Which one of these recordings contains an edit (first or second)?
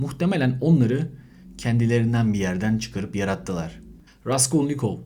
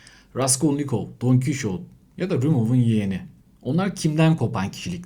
first